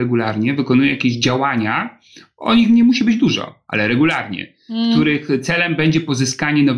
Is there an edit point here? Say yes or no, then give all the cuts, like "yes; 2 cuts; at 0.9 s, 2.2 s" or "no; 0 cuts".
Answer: no; 0 cuts